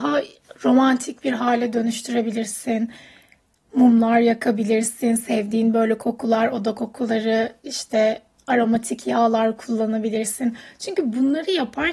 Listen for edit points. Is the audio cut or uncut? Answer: uncut